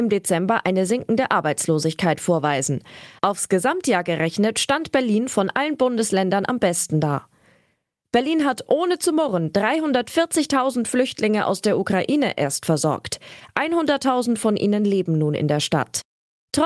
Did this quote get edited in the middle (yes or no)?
no